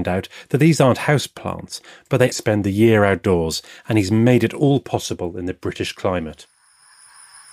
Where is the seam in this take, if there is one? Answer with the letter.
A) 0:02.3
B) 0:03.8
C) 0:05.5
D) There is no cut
A